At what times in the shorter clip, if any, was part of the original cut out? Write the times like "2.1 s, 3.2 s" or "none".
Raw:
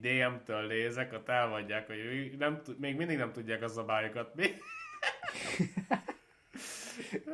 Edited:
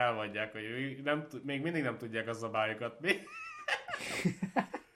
none